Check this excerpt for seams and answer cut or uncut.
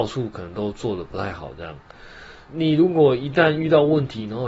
cut